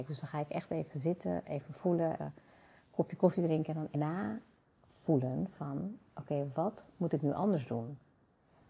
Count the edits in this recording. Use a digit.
2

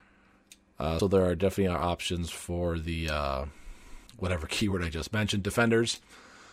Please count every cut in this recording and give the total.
2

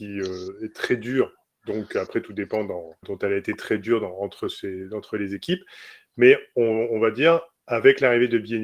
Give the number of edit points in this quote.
1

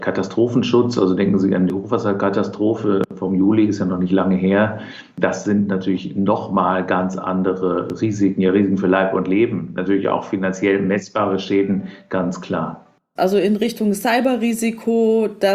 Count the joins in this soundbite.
1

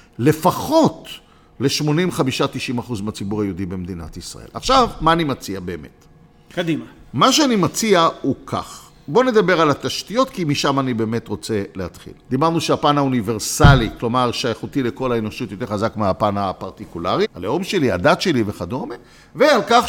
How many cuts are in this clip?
2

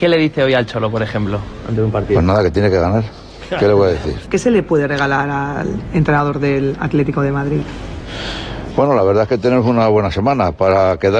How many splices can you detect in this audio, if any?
2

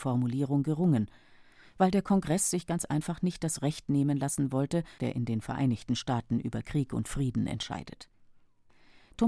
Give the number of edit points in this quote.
1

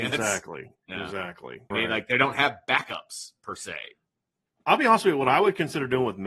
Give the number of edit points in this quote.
1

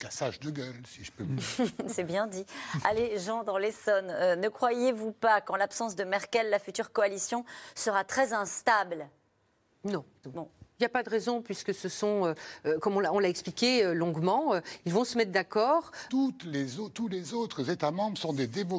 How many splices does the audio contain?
2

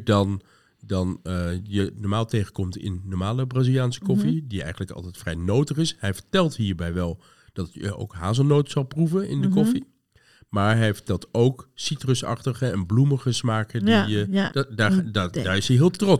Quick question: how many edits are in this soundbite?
1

